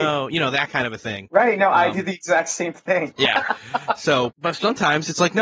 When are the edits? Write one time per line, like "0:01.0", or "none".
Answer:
0:04.3